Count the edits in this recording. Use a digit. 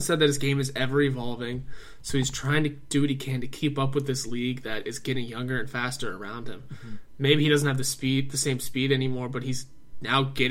0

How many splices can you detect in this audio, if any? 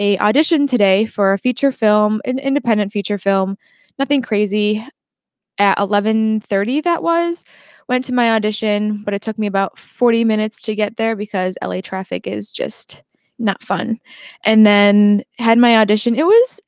1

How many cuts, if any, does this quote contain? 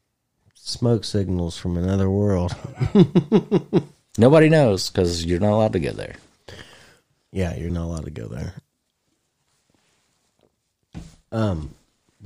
2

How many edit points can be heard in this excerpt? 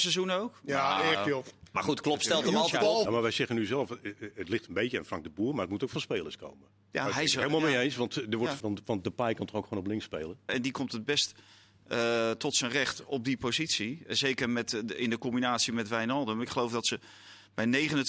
3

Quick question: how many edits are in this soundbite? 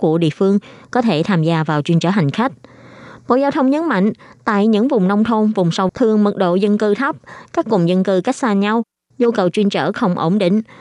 1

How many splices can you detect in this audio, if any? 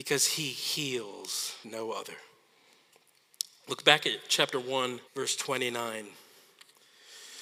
2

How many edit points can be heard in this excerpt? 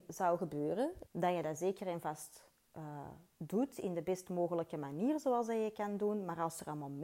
1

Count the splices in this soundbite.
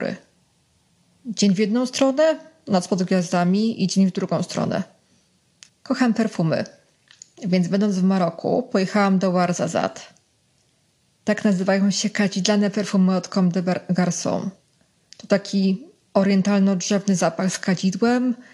1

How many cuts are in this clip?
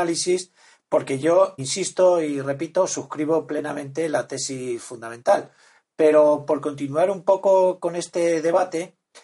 1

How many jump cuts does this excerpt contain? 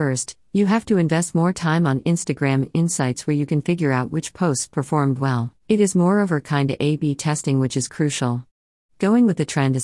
1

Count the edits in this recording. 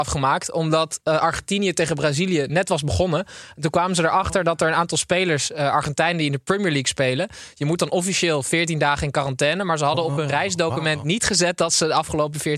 0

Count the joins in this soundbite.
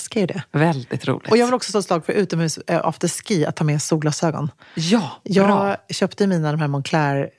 0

